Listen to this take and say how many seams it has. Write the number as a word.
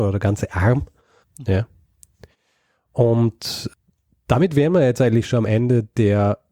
one